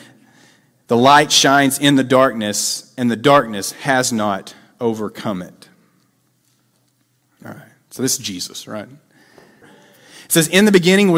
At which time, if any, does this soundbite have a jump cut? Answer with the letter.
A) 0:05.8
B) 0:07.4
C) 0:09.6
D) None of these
C